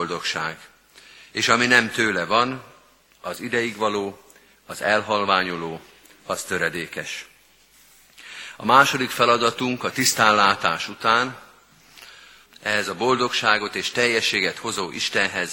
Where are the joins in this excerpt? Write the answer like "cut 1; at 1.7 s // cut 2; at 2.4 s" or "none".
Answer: cut 1; at 12.5 s